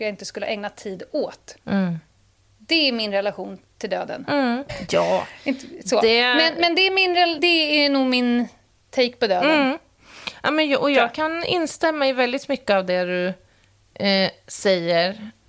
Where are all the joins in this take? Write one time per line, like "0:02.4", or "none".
0:04.7
0:07.4